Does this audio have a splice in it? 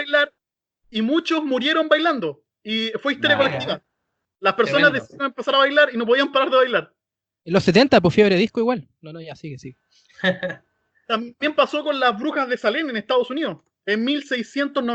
no; 0 cuts

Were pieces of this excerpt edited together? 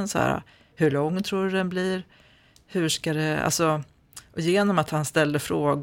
no; 0 cuts

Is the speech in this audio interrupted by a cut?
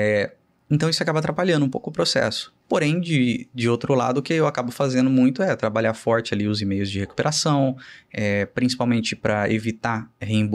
no; 0 cuts

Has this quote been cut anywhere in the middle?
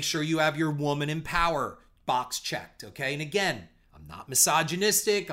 no; 0 cuts

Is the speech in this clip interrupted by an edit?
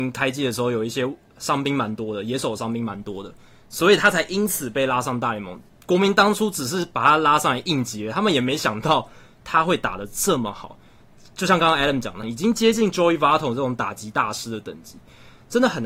yes; 1 cut; at 12.2 s

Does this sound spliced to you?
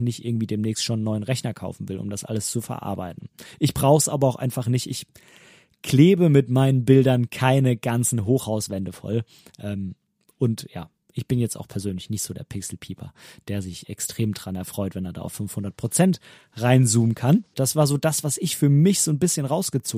yes; 1 cut; at 17.5 s

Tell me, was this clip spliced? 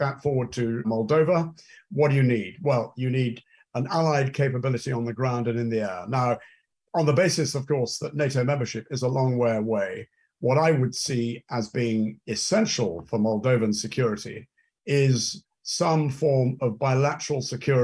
no; 0 cuts

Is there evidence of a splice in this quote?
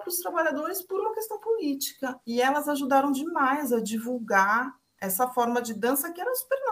yes; 1 cut; at 5.0 s

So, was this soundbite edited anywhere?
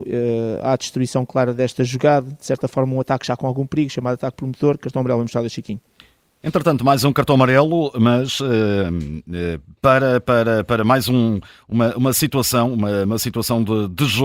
no; 0 cuts

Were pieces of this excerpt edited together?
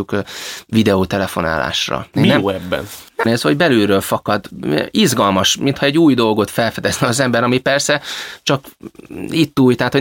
yes; 2 cuts; at 2.1 s, 3.2 s

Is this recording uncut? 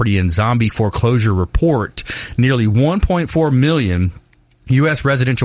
yes; 0 cuts

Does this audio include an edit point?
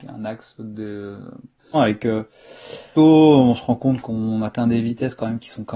yes; 2 cuts; at 1.7 s, 3.0 s

